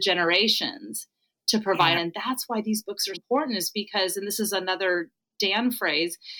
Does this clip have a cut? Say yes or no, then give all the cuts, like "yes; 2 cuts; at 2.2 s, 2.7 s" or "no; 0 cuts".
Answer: yes; 2 cuts; at 2.0 s, 3.1 s